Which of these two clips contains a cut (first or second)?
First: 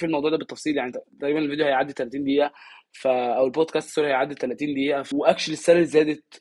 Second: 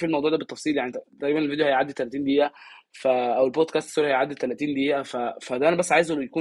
first